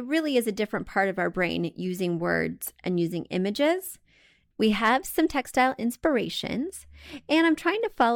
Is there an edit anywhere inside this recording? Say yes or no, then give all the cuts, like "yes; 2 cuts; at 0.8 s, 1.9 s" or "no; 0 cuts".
yes; 1 cut; at 4.5 s